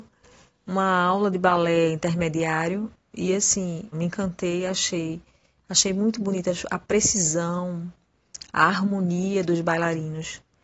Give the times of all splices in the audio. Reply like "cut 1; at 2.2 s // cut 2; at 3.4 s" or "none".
cut 1; at 3.9 s // cut 2; at 8.4 s

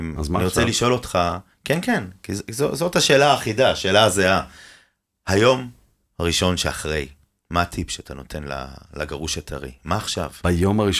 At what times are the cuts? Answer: none

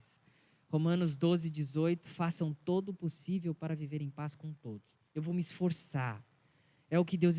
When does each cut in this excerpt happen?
cut 1; at 2.1 s // cut 2; at 5.1 s

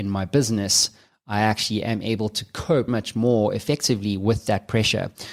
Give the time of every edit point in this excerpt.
cut 1; at 2.9 s

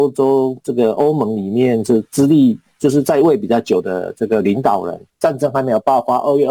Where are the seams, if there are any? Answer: cut 1; at 5.1 s

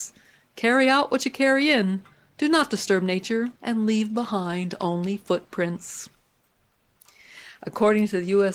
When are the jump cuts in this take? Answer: cut 1; at 3.6 s

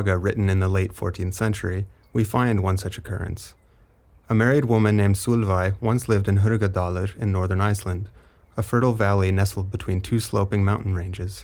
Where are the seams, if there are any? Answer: none

